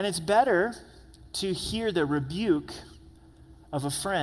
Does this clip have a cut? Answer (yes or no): no